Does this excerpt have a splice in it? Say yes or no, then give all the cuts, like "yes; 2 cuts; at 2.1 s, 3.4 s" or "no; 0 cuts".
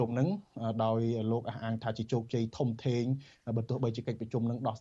no; 0 cuts